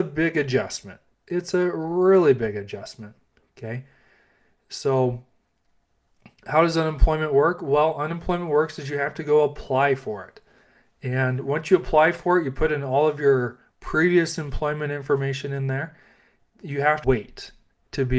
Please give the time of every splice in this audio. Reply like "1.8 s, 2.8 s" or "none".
17.0 s